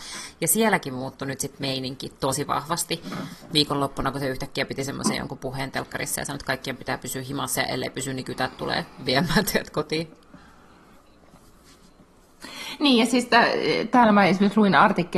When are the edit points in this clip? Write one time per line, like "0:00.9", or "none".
none

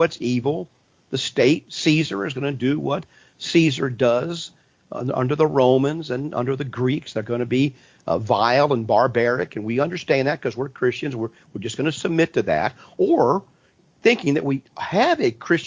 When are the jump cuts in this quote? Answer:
none

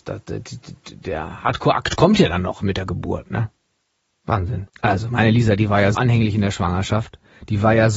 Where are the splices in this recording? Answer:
0:04.7
0:05.9

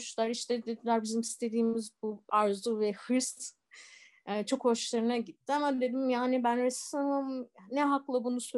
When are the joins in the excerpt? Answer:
0:02.3

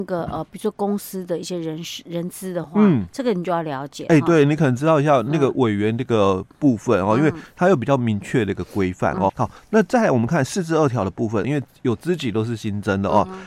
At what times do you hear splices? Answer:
0:09.3
0:11.4

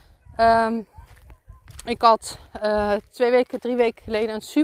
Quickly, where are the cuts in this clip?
none

